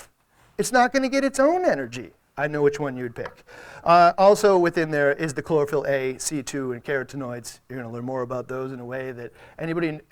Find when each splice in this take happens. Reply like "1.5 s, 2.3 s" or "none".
none